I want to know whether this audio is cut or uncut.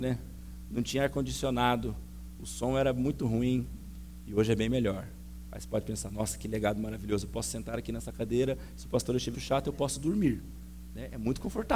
cut